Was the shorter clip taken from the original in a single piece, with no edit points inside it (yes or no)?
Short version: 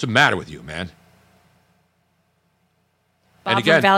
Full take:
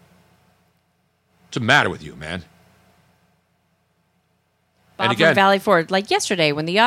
yes